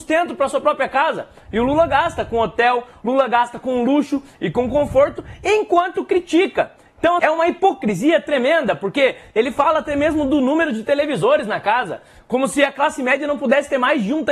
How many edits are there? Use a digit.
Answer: 1